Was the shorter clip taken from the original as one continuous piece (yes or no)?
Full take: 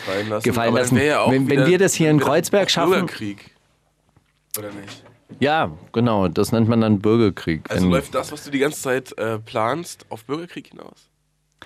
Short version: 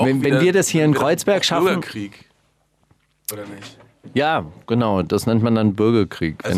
yes